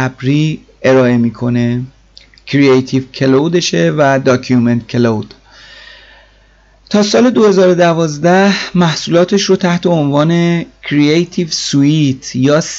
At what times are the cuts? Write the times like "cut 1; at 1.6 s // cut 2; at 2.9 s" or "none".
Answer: none